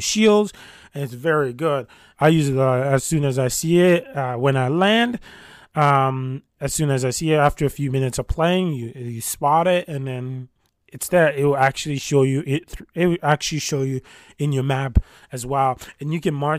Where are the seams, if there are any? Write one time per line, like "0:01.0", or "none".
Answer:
0:02.1

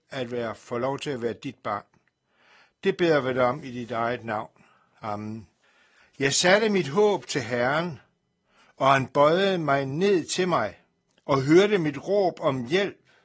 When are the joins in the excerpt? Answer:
0:06.0

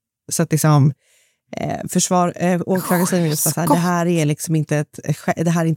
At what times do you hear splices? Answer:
none

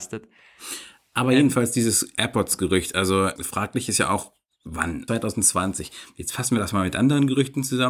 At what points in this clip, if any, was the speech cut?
0:03.4
0:05.1

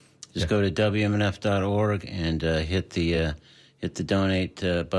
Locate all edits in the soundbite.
none

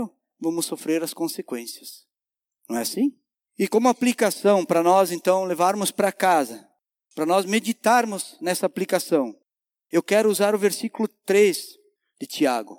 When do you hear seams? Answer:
none

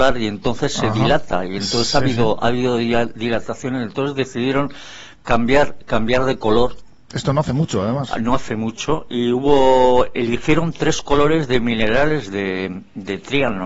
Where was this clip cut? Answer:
none

